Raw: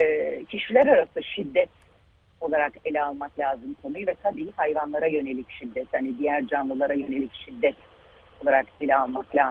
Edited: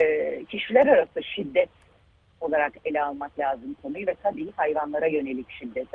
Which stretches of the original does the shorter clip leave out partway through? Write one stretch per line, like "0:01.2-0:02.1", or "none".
none